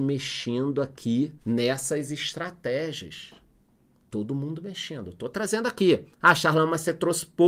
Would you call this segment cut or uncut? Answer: cut